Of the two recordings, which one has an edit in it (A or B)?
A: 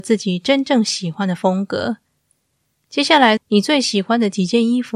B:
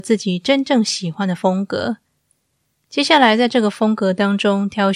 A